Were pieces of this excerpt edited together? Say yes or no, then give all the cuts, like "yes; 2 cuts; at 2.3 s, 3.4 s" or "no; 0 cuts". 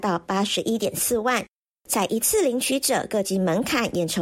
yes; 1 cut; at 1.8 s